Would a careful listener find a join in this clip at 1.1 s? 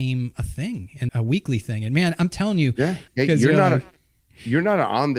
yes; 2 cuts; at 1.1 s, 3.1 s

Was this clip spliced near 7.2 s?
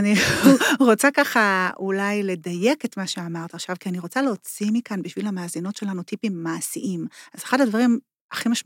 no; 0 cuts

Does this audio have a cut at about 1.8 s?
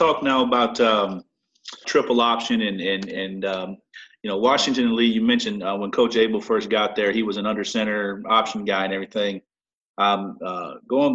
yes; 1 cut; at 1.8 s

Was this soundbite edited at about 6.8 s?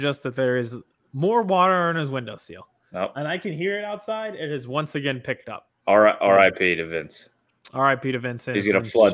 no; 0 cuts

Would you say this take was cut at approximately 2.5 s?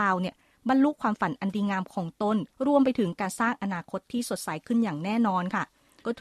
yes; 1 cut; at 2.5 s

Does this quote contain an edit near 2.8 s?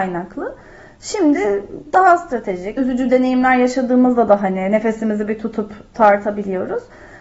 yes; 1 cut; at 2.8 s

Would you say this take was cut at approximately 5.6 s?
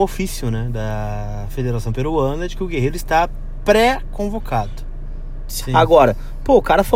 yes; 1 cut; at 5.6 s

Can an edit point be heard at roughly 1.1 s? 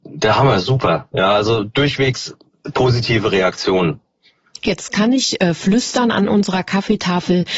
no; 0 cuts

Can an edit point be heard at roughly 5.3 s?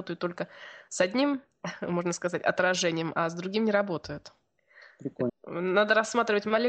yes; 1 cut; at 5.3 s

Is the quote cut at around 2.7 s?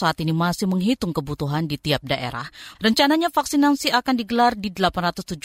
yes; 1 cut; at 2.7 s

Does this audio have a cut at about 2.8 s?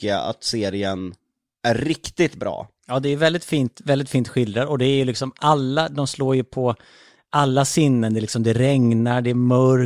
yes; 1 cut; at 2.8 s

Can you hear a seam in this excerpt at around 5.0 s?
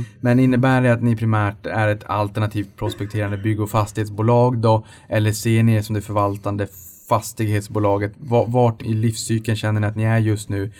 no; 1 cut; at 8.8 s

